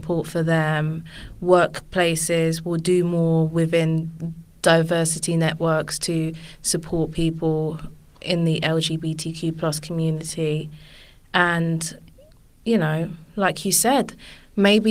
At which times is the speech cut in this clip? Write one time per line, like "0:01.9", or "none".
none